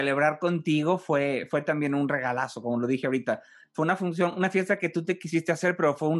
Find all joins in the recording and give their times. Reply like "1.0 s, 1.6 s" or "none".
none